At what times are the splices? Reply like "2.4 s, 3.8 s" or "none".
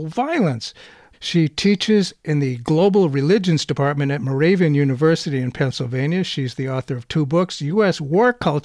1.1 s